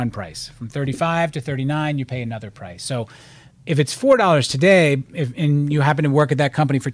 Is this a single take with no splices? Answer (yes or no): yes